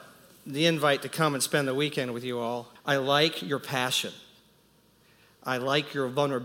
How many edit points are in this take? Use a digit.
1